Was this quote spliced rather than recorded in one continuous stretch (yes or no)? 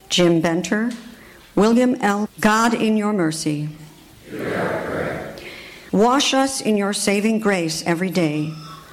yes